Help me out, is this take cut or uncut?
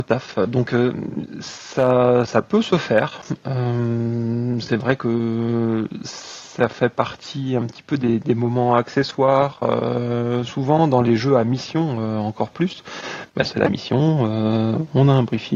cut